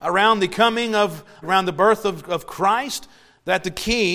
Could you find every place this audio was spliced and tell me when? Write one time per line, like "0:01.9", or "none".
0:01.4